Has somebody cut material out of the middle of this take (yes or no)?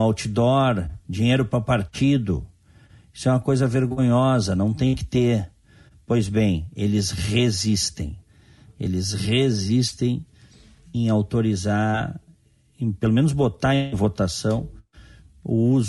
no